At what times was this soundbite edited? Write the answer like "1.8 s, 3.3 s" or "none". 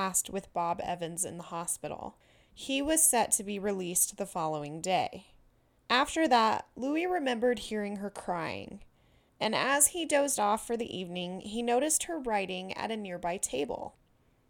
5.8 s